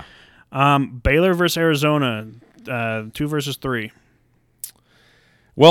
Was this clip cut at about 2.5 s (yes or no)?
no